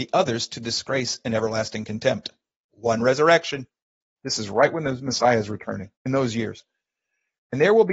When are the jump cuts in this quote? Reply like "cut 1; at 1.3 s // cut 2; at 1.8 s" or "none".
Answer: cut 1; at 4.2 s // cut 2; at 6.0 s